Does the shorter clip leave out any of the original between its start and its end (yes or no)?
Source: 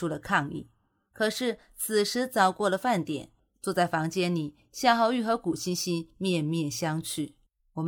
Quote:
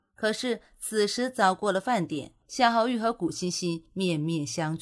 yes